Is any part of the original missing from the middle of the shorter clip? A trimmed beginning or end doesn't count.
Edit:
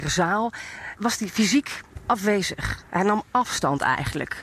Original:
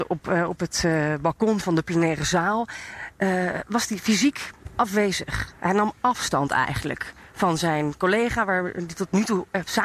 yes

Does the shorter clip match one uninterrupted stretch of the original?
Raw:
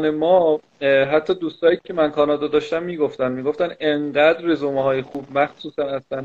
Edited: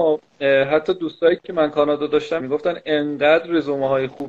no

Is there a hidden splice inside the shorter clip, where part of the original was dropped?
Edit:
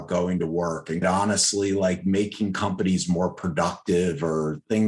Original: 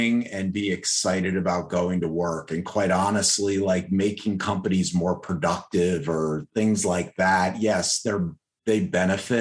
yes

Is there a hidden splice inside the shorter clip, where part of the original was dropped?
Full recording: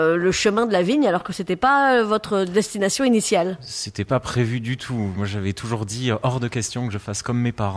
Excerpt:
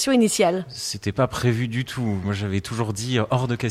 no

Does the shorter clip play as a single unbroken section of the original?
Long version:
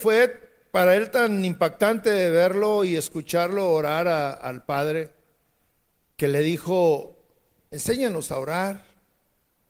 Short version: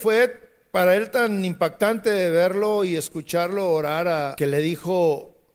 no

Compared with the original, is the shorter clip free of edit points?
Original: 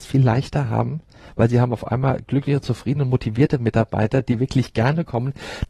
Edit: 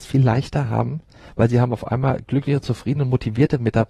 yes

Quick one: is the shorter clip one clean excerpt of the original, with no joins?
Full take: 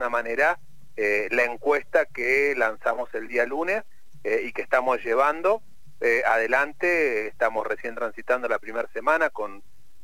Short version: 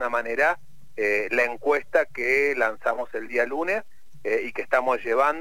yes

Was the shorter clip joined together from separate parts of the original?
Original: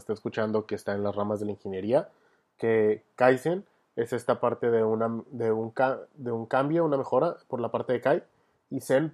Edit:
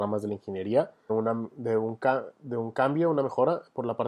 yes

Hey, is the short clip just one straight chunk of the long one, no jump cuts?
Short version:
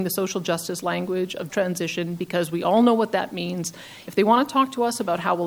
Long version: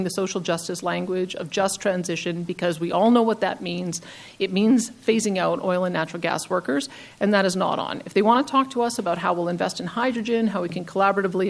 no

